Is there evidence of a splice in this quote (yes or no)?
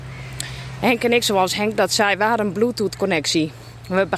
no